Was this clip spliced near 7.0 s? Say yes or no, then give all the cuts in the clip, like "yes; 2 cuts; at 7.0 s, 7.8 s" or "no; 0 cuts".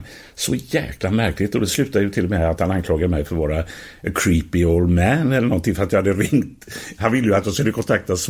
no; 0 cuts